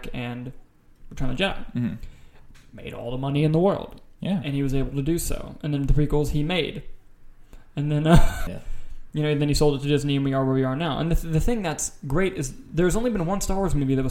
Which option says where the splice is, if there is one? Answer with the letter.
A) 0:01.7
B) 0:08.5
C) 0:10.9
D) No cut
B